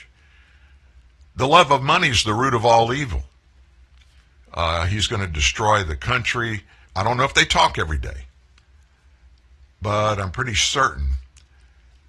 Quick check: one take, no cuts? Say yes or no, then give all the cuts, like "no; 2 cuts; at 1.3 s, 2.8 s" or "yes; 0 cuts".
no; 2 cuts; at 4.3 s, 6.8 s